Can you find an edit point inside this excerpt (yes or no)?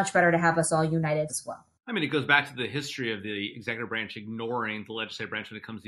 yes